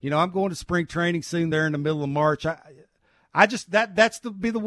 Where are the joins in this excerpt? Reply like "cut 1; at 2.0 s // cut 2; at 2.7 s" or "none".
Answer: none